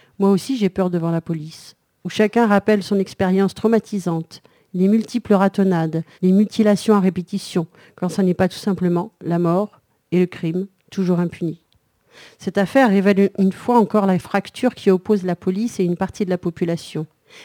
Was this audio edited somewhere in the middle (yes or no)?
yes